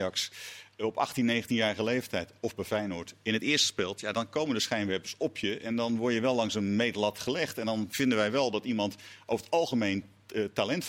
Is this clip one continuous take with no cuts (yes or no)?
yes